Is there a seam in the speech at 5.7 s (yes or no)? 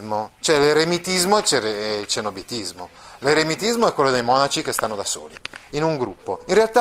yes